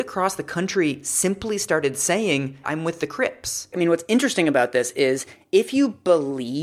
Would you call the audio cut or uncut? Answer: cut